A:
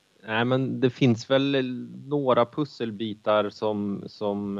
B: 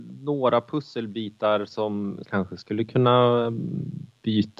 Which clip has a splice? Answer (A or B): B